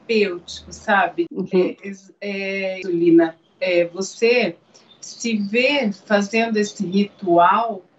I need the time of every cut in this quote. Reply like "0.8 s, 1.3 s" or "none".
1.3 s, 2.8 s